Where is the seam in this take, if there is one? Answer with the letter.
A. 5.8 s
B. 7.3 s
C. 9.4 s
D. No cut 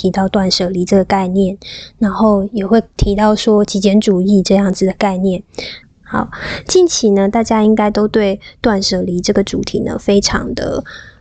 A